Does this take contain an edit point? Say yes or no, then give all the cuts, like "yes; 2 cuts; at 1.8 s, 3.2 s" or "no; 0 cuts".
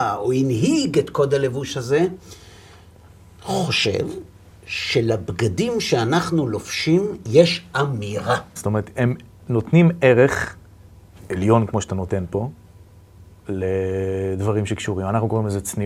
yes; 1 cut; at 8.6 s